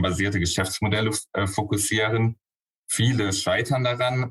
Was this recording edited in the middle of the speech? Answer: no; 0 cuts

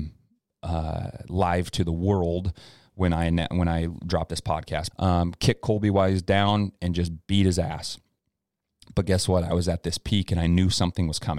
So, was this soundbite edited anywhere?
yes; 1 cut; at 4.9 s

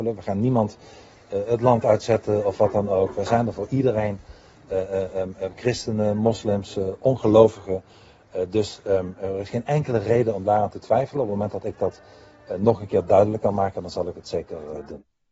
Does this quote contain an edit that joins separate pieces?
no; 0 cuts

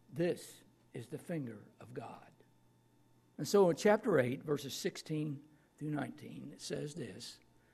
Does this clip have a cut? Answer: yes; 1 cut; at 3.3 s

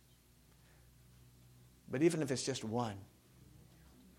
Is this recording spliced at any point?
no; 0 cuts

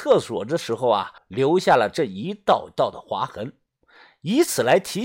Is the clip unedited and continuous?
no; 1 cut; at 1.2 s

